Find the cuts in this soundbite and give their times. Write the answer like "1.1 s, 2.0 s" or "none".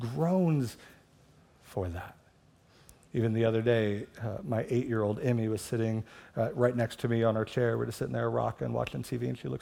none